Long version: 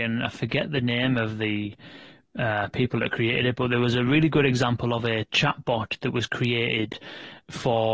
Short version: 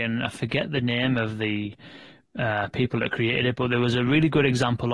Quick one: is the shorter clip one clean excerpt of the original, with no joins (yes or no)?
yes